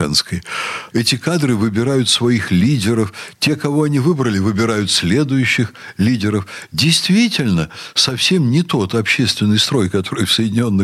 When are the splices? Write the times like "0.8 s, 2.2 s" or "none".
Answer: 0.9 s